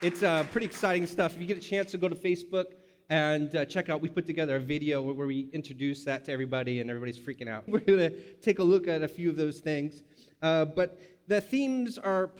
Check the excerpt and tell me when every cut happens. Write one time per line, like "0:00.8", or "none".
0:07.7